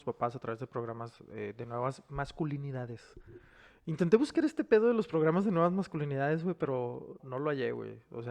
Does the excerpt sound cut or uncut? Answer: cut